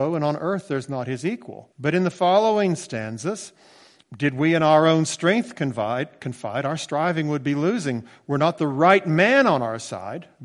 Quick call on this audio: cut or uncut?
cut